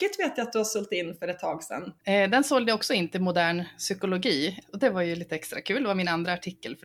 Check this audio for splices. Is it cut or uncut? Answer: cut